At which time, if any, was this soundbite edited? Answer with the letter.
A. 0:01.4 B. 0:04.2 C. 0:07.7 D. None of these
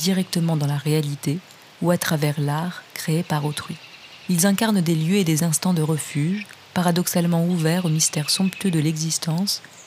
D